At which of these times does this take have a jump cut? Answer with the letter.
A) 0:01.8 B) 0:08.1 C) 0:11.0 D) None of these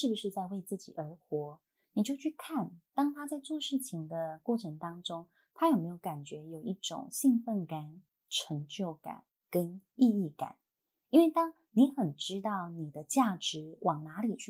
B